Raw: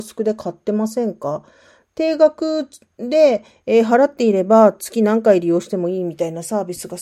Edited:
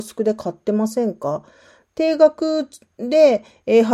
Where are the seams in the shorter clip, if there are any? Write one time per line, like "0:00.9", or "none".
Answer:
none